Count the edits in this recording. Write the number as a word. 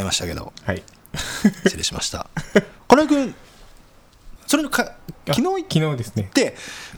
one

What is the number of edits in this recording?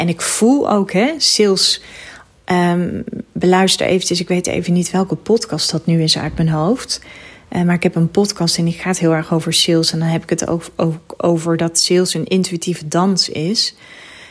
zero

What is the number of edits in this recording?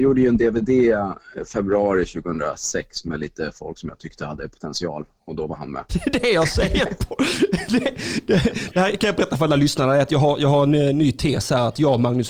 one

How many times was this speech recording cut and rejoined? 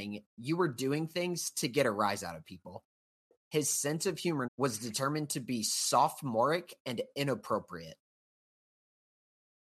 one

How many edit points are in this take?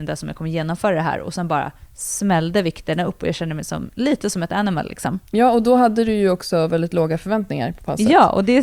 zero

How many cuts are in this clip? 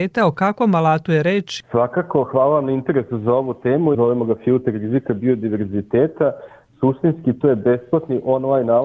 one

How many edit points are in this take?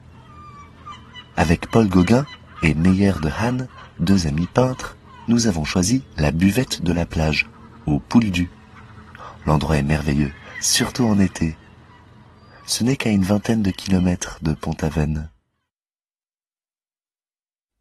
zero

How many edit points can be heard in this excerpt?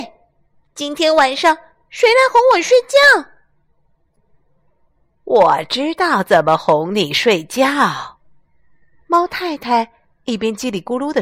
zero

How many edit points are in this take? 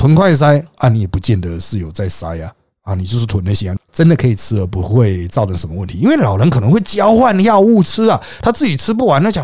one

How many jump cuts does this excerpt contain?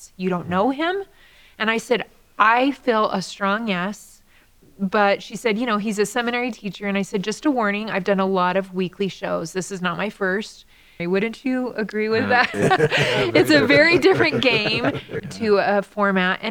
three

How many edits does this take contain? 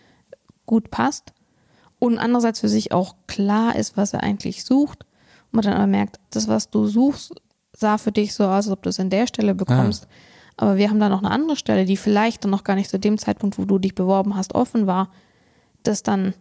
one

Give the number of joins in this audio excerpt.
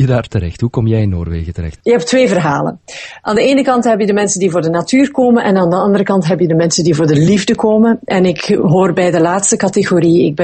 one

